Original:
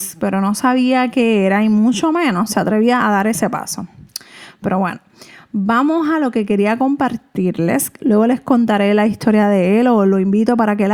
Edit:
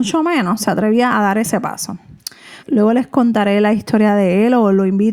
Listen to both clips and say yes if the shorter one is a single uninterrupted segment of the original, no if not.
no